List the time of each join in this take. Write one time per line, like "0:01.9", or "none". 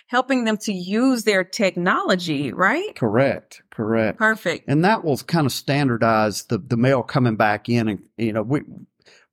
0:04.2